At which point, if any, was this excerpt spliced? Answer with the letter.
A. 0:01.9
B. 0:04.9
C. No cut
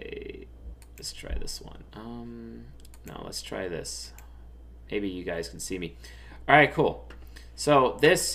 A